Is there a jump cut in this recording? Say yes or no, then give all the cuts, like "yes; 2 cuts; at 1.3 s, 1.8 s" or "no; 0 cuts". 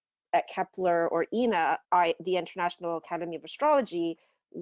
yes; 1 cut; at 1.8 s